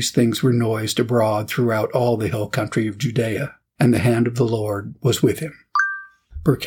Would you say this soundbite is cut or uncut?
cut